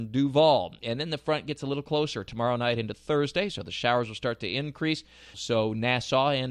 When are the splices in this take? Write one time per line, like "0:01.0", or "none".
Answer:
0:05.3